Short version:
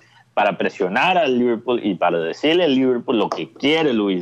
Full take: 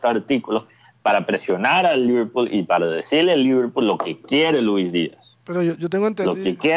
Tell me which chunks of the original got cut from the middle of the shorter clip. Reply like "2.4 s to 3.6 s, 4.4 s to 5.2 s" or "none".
none